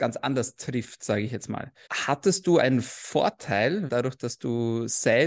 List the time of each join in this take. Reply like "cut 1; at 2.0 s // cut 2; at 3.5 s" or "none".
cut 1; at 1.9 s // cut 2; at 3.9 s